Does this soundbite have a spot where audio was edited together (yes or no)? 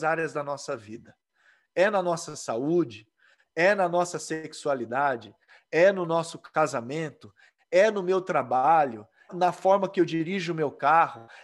yes